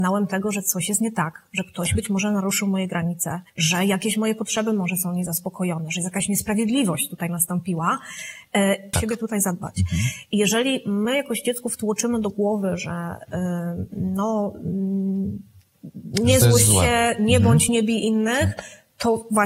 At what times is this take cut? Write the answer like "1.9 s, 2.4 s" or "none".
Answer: 3.5 s, 8.9 s